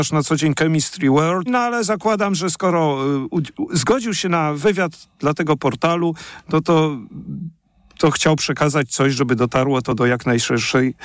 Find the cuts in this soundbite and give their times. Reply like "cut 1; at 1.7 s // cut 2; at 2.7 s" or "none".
cut 1; at 1.5 s